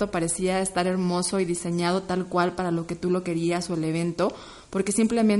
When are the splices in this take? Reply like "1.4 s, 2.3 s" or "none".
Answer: none